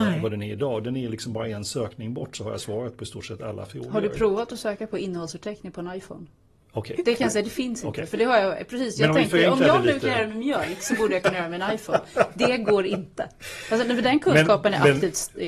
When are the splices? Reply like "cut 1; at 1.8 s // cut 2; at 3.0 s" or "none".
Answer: cut 1; at 7.0 s